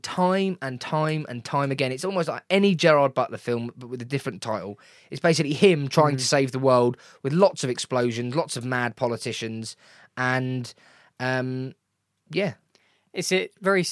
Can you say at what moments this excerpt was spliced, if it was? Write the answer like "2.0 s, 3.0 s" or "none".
none